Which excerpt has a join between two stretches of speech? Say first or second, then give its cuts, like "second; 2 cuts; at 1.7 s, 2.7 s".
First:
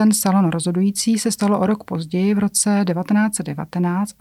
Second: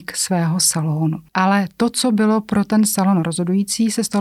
second; 1 cut; at 1.3 s